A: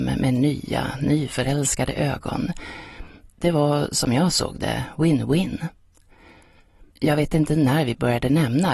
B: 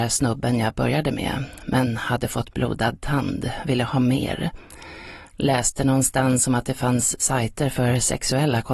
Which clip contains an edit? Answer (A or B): A